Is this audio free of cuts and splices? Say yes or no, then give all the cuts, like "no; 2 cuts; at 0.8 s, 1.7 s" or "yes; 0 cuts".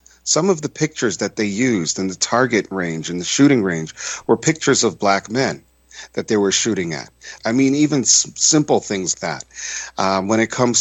no; 2 cuts; at 7.4 s, 9.1 s